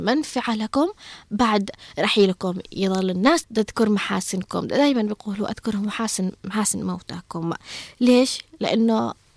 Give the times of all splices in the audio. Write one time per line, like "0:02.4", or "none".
0:03.4